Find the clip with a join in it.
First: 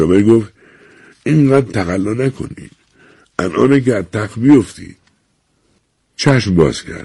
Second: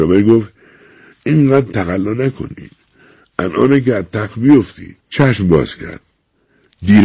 second; 1 cut; at 5.0 s

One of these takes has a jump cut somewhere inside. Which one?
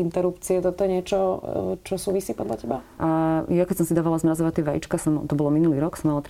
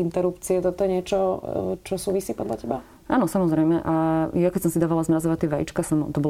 first; 1 cut; at 3.0 s

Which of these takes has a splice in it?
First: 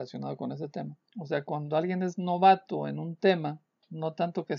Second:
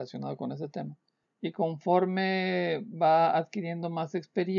first; 1 cut; at 1.1 s

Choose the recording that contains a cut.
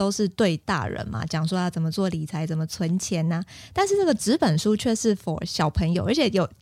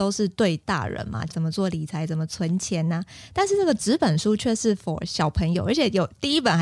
second; 1 cut; at 1.3 s

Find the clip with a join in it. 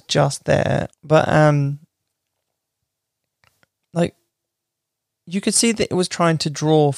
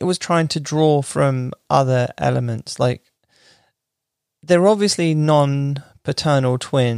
first; 1 cut; at 0.9 s

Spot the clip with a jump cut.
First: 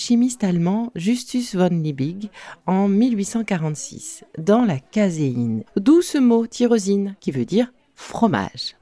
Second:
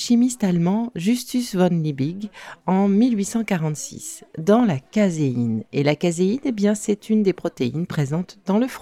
first; 2 cuts; at 5.7 s, 7.2 s

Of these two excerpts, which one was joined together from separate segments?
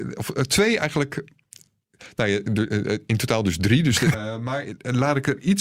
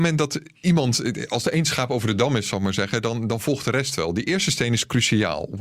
first; 1 cut; at 4.1 s

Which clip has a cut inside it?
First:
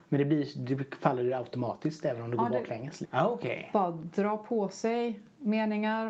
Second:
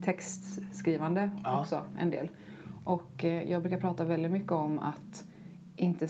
first; 1 cut; at 3.0 s

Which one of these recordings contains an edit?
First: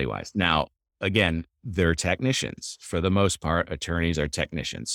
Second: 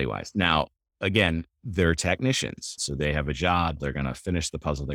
second; 2 cuts; at 2.8 s, 3.8 s

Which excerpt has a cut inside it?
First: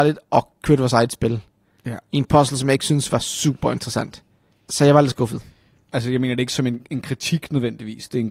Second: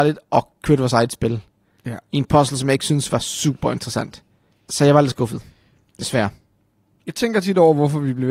first; 1 cut; at 5.9 s

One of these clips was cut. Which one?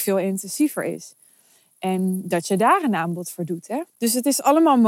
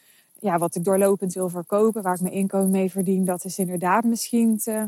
first; 1 cut; at 3.9 s

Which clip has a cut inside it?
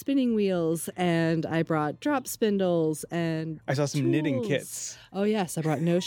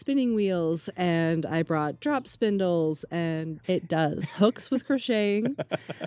second; 1 cut; at 3.6 s

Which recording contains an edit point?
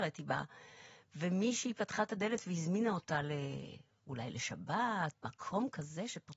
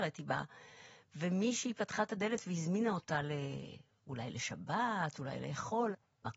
first; 1 cut; at 5.1 s

